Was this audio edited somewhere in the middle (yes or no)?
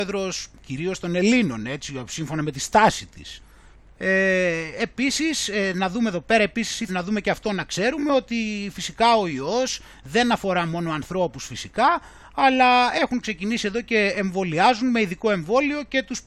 yes